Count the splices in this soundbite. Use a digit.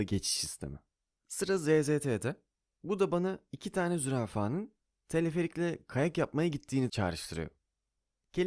0